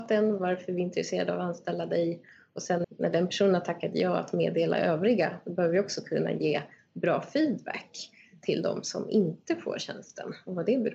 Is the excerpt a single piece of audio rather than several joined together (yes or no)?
no